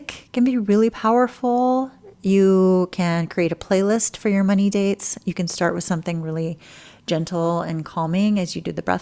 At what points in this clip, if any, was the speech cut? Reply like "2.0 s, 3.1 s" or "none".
none